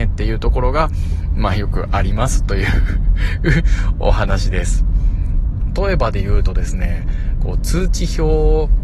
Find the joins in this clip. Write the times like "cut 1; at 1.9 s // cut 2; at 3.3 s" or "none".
cut 1; at 5.7 s